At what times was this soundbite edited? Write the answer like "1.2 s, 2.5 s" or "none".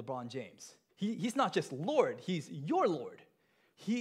0.9 s